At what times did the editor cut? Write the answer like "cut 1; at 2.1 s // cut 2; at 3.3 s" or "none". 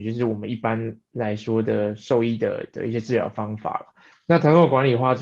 cut 1; at 4.1 s

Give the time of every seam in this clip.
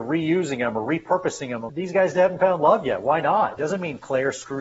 cut 1; at 1.7 s // cut 2; at 3.6 s

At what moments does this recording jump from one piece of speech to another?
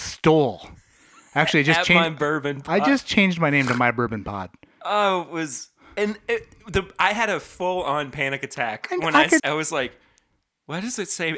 cut 1; at 9.4 s

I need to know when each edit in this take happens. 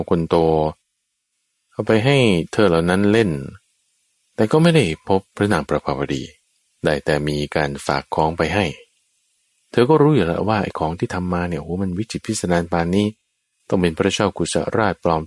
cut 1; at 5.3 s

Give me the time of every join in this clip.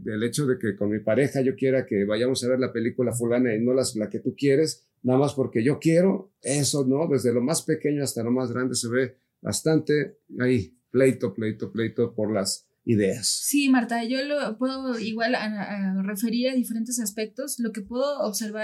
none

